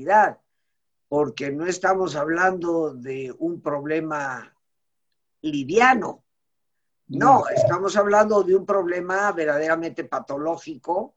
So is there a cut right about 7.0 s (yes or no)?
no